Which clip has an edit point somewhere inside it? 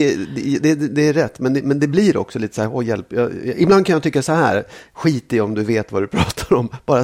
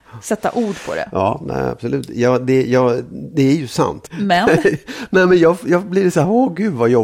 second; 1 cut; at 4.1 s

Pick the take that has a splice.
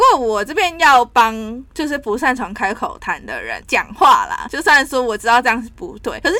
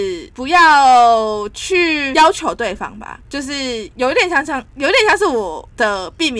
first; 1 cut; at 3.6 s

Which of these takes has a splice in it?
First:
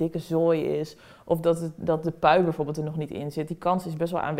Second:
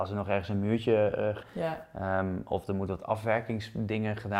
second; 1 cut; at 1.4 s

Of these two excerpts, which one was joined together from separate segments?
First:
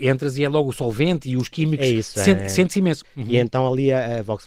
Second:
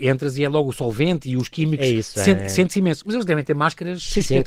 first; 1 cut; at 3.0 s

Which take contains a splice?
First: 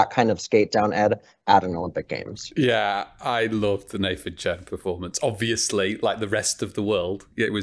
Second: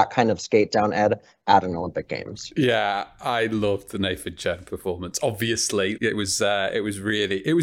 second; 1 cut; at 6.0 s

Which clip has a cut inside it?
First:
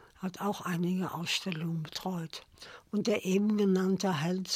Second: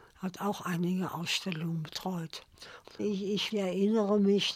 second; 1 cut; at 2.8 s

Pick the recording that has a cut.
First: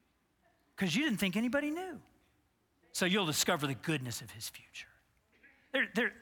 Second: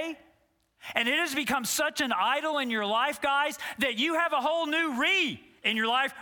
first; 1 cut; at 2.8 s

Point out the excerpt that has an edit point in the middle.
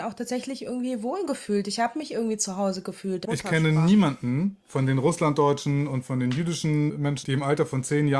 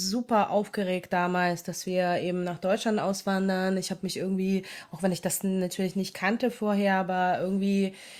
first; 2 cuts; at 3.3 s, 7.2 s

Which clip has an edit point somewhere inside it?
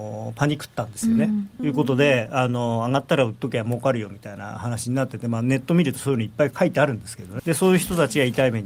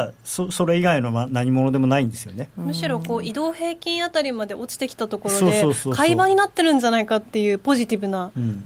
first; 2 cuts; at 1.6 s, 7.4 s

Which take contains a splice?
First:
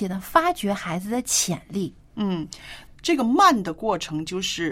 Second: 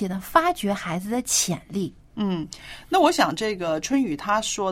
first; 1 cut; at 2.9 s

